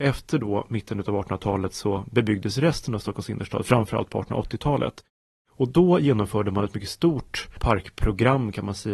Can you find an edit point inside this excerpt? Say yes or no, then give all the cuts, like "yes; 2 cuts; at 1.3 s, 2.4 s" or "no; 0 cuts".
no; 0 cuts